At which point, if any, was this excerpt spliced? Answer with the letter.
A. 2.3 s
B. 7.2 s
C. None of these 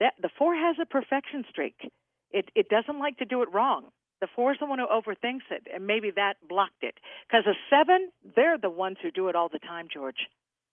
C